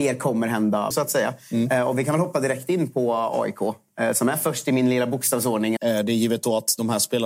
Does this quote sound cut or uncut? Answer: cut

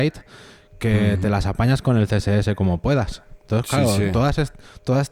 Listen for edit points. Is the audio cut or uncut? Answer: uncut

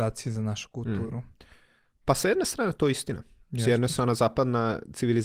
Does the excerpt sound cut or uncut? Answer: uncut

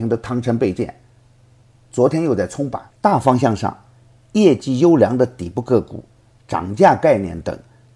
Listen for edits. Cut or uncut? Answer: cut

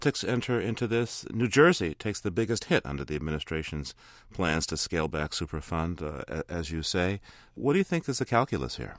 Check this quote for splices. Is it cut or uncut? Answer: uncut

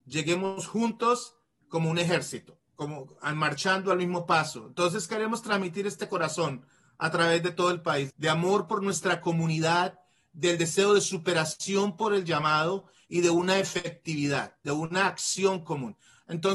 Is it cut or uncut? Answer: cut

